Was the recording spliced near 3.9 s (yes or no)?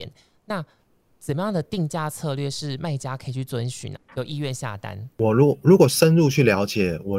yes